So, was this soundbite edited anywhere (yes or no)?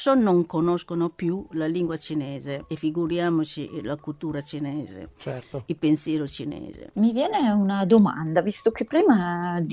no